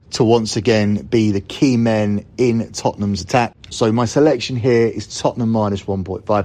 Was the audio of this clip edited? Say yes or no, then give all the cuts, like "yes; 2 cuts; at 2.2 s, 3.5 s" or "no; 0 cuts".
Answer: yes; 1 cut; at 3.7 s